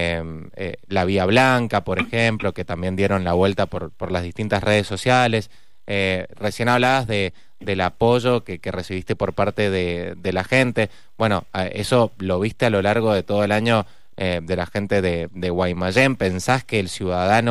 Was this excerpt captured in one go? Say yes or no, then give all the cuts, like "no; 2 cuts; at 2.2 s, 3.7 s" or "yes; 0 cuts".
yes; 0 cuts